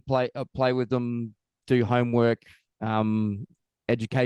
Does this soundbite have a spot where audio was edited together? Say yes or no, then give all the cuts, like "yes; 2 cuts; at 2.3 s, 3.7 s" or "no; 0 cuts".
no; 0 cuts